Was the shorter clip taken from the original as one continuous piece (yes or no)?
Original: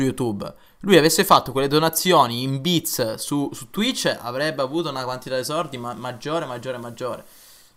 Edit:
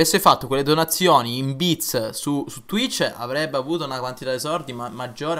yes